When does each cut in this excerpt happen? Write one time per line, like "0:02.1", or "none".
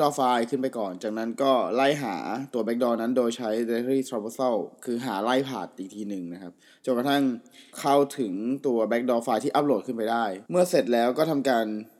0:07.7
0:10.5

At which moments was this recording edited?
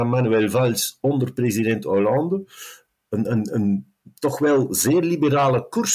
none

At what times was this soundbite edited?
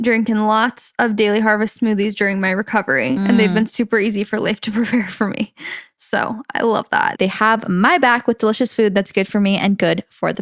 0:07.2

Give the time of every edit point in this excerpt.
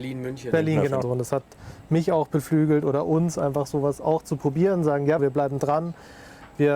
0:01.0
0:05.2

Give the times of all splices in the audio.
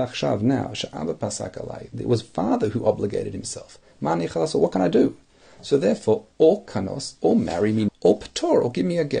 0:07.9

